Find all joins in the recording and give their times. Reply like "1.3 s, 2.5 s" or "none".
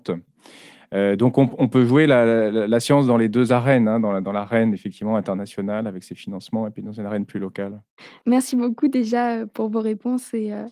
none